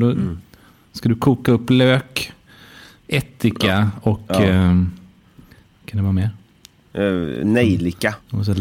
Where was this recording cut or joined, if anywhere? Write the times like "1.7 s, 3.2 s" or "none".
none